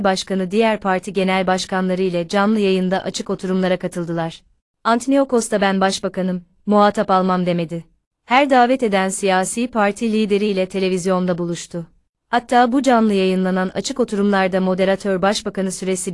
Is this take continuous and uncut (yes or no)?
yes